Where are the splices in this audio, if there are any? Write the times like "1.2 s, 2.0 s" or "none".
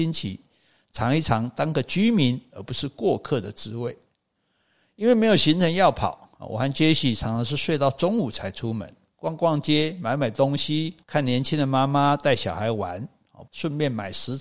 11.0 s, 13.5 s